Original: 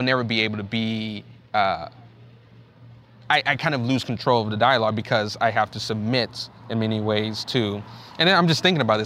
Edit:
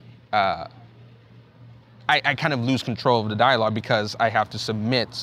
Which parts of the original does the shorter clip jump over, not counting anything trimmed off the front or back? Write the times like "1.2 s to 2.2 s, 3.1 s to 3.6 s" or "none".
none